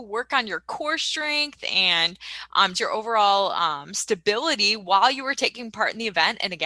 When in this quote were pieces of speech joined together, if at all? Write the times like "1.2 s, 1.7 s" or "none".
2.7 s

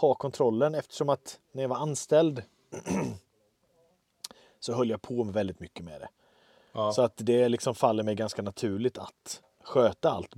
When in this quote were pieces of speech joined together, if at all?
none

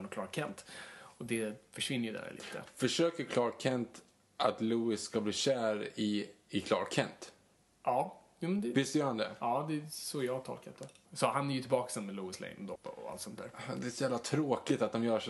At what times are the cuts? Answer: 11.1 s, 12.8 s

